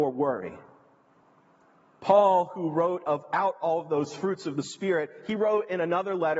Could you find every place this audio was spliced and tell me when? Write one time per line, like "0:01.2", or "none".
none